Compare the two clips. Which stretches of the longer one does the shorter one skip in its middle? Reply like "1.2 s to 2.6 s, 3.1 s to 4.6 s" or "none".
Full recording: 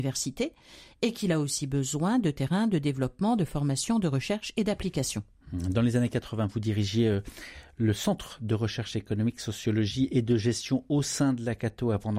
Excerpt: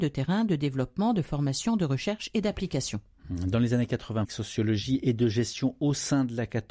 6.5 s to 9.3 s